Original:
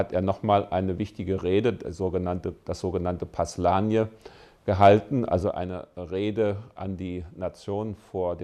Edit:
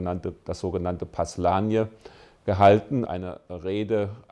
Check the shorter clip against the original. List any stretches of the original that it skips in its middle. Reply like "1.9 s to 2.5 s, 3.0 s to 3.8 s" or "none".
5.3 s to 5.5 s